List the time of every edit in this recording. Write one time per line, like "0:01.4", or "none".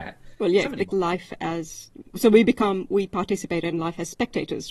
0:00.9